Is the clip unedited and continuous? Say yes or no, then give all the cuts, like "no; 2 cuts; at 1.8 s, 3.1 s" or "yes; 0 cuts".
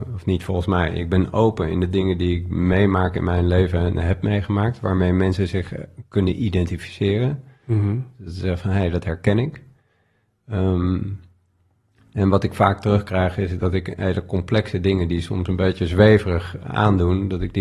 yes; 0 cuts